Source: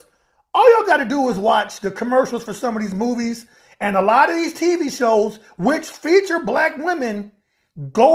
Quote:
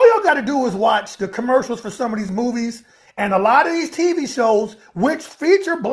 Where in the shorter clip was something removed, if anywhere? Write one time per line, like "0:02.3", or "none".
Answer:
none